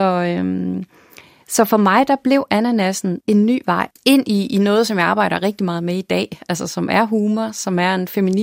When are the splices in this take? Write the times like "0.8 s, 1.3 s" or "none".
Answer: none